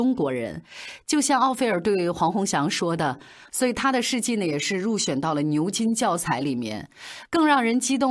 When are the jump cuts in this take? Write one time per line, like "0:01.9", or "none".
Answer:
0:03.5